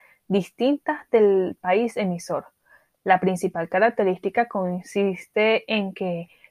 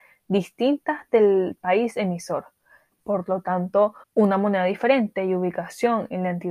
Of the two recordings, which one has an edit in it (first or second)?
second